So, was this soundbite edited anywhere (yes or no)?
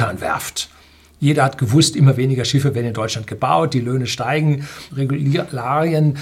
yes